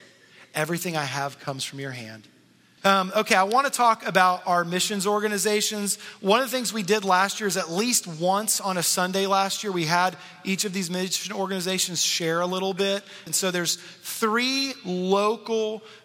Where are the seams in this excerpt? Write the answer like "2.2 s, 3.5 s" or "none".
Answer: 2.8 s, 13.3 s